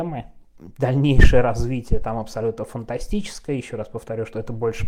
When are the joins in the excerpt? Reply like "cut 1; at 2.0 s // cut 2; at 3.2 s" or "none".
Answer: none